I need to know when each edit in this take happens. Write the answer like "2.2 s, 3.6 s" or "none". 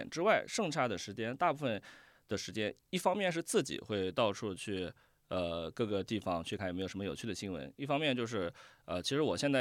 6.6 s